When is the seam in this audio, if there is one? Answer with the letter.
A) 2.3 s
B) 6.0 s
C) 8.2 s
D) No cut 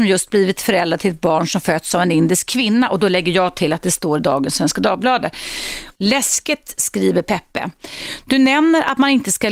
B